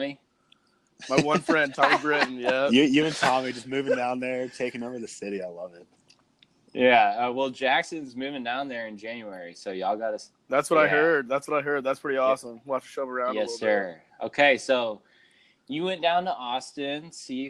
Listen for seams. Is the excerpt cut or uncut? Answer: uncut